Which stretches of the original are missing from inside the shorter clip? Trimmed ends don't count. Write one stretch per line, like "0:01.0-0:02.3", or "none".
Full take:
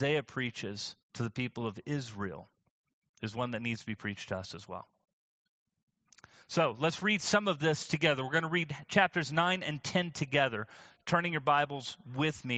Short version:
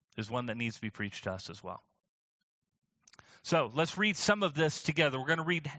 none

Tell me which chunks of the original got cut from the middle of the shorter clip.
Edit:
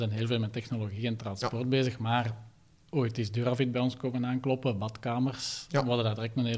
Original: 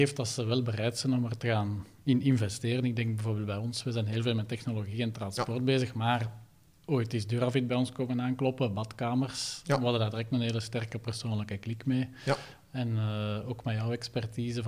none

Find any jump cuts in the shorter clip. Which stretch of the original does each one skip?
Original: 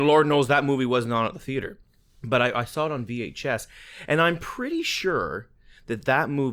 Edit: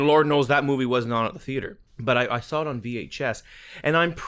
0:01.9-0:02.1

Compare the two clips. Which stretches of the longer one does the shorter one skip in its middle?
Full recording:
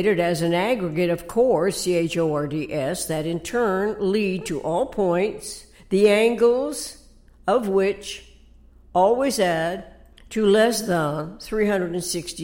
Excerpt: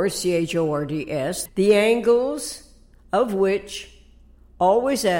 0:03.1-0:05.8

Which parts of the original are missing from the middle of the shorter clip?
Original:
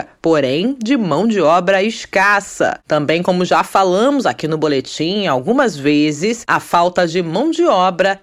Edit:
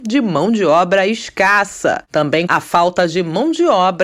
0:03.2-0:06.5

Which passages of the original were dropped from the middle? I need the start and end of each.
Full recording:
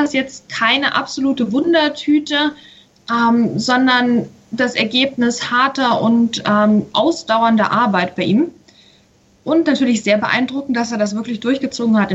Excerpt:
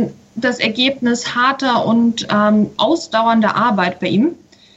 none

